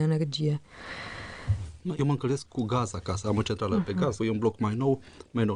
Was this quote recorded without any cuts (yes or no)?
no